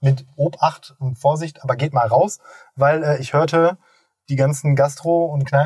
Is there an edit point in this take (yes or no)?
no